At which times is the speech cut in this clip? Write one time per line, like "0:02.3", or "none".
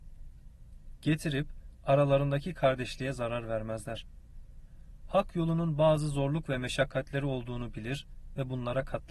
none